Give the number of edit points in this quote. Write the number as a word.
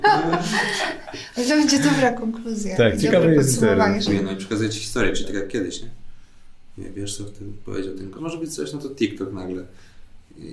two